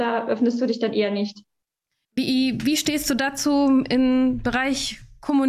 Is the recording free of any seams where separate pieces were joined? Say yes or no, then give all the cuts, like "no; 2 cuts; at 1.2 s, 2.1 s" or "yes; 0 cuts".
no; 1 cut; at 2.0 s